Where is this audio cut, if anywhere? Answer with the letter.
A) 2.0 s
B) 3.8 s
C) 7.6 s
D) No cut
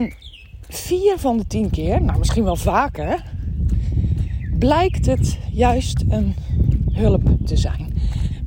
D